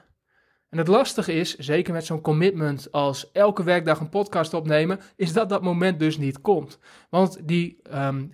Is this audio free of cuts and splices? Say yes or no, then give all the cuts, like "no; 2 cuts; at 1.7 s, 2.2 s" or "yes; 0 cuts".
yes; 0 cuts